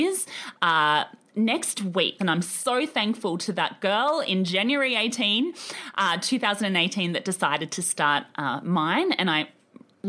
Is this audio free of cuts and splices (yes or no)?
no